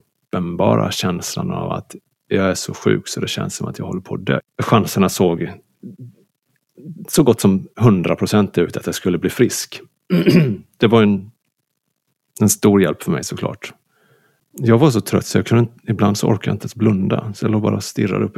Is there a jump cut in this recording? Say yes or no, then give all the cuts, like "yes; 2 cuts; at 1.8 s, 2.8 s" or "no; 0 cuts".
yes; 2 cuts; at 4.4 s, 14.4 s